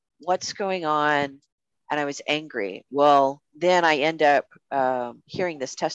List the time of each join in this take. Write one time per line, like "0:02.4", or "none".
0:01.7